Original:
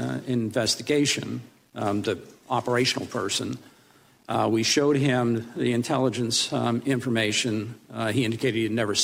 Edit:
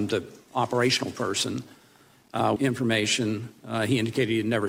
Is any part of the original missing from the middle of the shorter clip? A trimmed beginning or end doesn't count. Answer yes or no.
yes